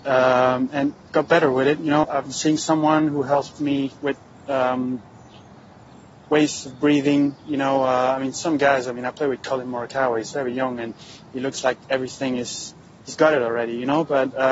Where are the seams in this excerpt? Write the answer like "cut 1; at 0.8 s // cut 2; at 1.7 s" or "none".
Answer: cut 1; at 2.0 s